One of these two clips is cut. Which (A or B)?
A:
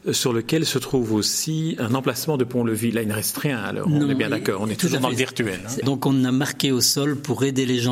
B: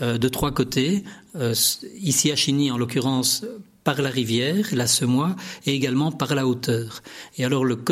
A